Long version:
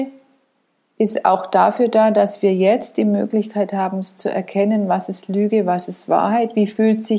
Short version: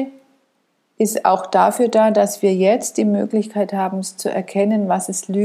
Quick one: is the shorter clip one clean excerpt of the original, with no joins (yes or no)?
yes